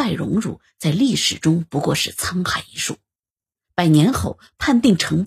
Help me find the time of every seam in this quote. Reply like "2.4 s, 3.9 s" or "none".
none